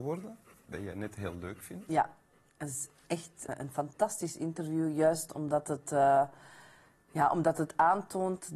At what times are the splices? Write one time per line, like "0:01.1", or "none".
0:03.5